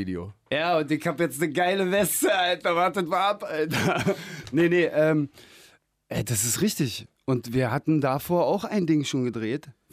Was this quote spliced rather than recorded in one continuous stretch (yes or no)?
no